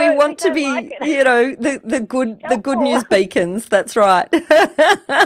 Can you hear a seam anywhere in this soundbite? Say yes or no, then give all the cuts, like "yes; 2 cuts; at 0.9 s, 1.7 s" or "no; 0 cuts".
no; 0 cuts